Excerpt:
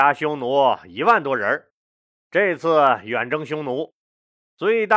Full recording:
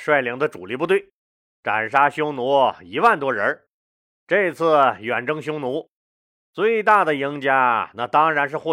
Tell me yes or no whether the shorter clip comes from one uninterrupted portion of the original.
yes